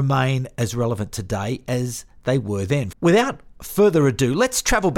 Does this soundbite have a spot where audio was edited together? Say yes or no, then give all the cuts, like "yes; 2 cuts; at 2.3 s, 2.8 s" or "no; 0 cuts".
yes; 1 cut; at 2.9 s